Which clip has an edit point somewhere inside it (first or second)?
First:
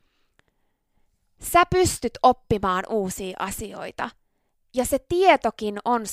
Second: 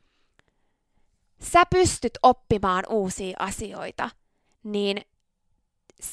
second